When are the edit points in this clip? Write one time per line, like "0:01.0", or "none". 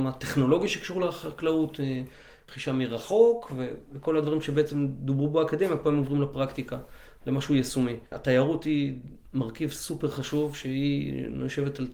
0:08.1